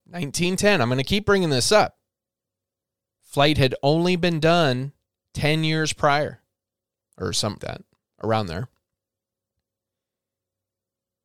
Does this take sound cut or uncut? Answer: cut